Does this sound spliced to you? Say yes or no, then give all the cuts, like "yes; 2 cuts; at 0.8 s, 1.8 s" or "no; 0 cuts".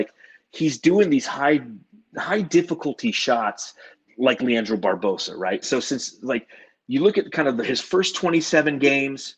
yes; 1 cut; at 5.6 s